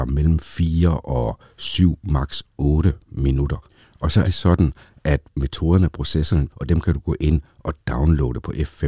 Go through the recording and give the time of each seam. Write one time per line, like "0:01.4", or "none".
0:04.2
0:06.5